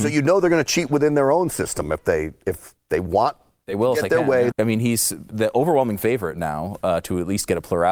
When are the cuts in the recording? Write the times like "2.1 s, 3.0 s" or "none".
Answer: 4.5 s

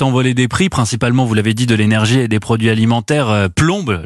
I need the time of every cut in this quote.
none

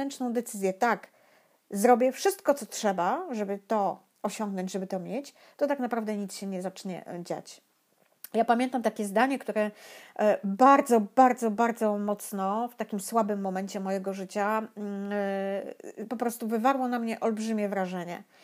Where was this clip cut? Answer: none

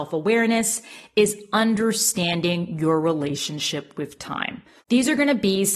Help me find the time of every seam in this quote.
4.8 s

